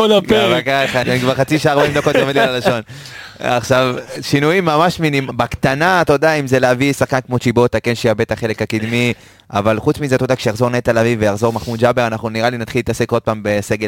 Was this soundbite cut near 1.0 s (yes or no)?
yes